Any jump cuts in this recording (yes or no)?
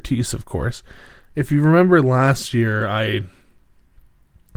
yes